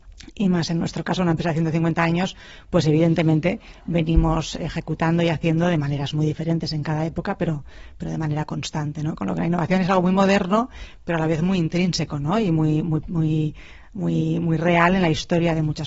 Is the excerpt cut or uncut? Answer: uncut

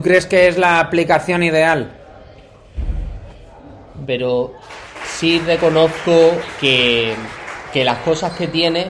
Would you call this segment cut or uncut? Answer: cut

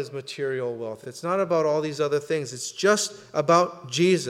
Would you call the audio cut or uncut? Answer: uncut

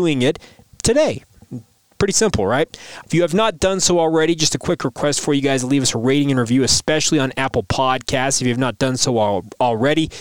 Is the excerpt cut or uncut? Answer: cut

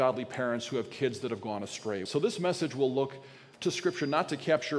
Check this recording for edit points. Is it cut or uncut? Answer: cut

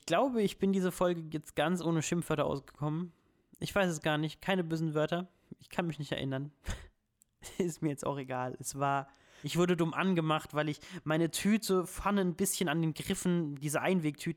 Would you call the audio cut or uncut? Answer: cut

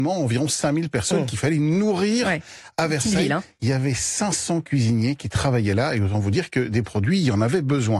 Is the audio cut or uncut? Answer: uncut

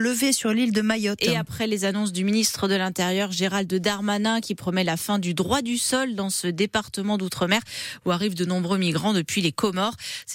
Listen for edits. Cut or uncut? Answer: uncut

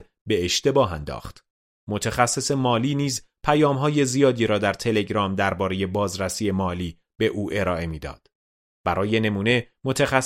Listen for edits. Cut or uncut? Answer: cut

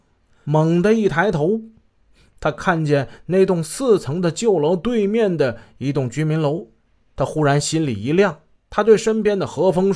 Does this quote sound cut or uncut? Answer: cut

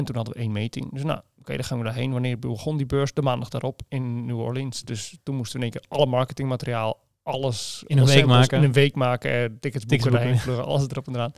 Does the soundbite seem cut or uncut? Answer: uncut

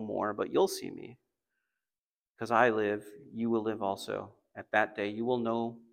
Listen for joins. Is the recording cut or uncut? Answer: uncut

